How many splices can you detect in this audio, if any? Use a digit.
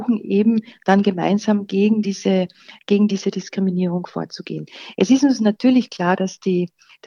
0